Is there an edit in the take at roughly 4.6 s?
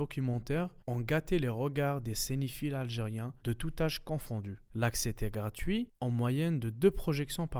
no; 1 cut; at 3.4 s

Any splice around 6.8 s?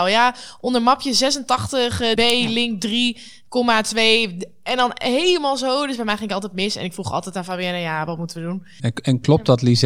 no; 2 cuts; at 2.2 s, 8.8 s

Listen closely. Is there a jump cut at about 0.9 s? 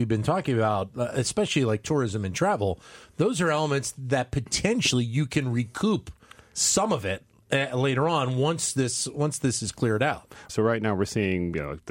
no; 1 cut; at 10.5 s

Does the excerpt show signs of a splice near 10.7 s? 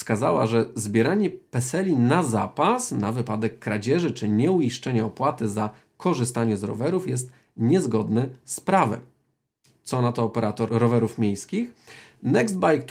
yes; 1 cut; at 10.7 s

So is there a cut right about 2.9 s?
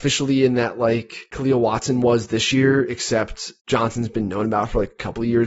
no; 0 cuts

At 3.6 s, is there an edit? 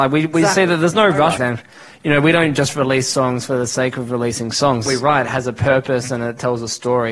no; 2 cuts; at 1.4 s, 4.9 s

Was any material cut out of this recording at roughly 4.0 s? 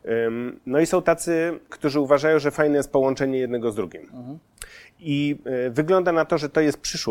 no; 1 cut; at 1.7 s

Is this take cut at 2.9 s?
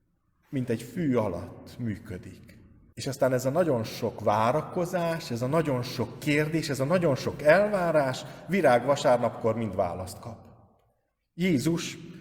yes; 1 cut; at 2.9 s

